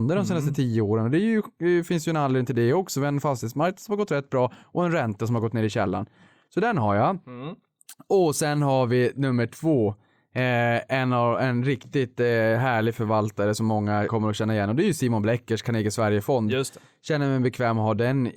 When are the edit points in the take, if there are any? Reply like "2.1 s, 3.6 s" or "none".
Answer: 14.1 s